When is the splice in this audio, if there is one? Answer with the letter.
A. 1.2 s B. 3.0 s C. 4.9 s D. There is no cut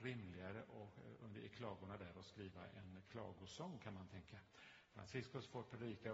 C